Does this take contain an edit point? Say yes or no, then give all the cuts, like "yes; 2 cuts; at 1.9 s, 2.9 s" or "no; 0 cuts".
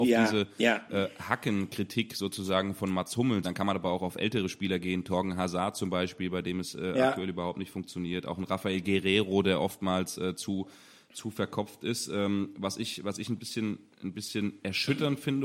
yes; 1 cut; at 3.4 s